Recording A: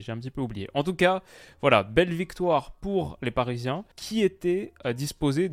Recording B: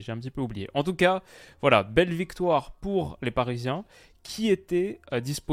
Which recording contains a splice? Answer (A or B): A